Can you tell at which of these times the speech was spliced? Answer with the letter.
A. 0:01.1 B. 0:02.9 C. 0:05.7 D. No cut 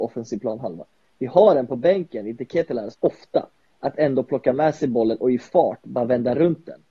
B